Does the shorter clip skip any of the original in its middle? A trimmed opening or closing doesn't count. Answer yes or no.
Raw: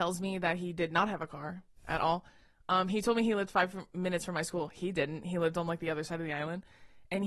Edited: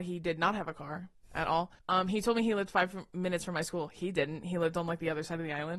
yes